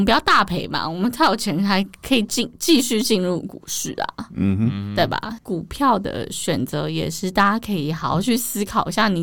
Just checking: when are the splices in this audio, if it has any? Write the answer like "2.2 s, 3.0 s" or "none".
5.4 s

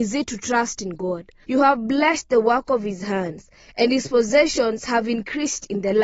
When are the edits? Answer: 1.4 s

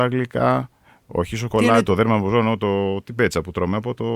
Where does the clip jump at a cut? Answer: 1.9 s

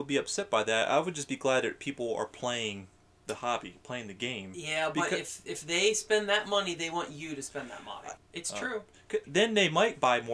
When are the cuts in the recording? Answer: 8.2 s, 9.2 s

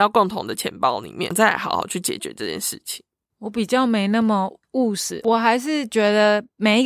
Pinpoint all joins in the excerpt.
4.6 s

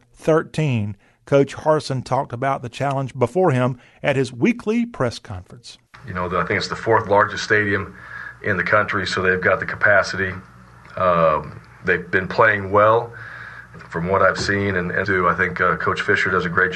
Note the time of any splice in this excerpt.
13.7 s, 15.0 s

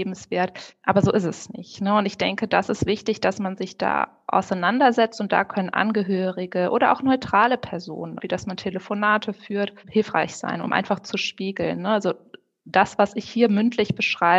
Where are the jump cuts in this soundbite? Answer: 8.2 s

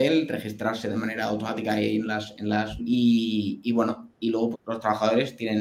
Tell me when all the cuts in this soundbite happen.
2.8 s, 4.5 s

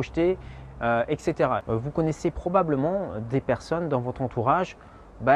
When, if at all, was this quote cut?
1.6 s

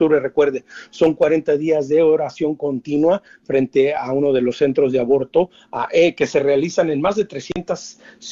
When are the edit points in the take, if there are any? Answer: none

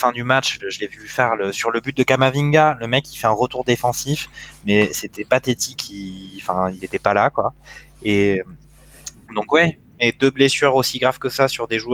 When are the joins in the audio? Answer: 6.8 s, 9.9 s

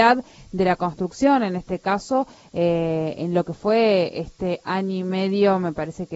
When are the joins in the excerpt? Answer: none

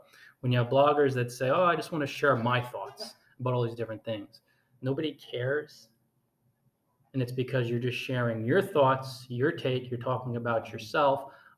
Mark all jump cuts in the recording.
none

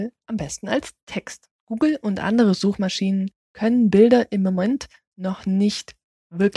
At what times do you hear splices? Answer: 1.6 s, 3.4 s

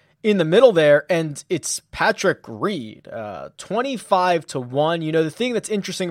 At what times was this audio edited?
none

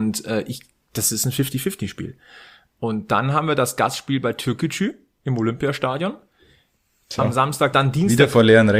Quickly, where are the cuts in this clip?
7.7 s

